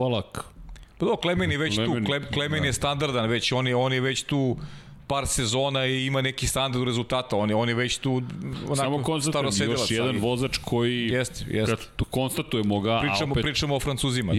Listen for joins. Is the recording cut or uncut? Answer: uncut